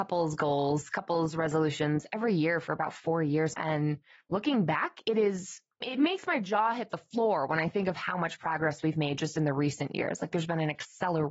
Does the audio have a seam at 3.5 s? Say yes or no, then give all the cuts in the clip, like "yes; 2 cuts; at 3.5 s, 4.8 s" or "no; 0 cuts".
yes; 2 cuts; at 3.5 s, 5.8 s